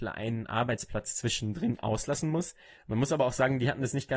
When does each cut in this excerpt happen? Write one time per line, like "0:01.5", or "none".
0:02.8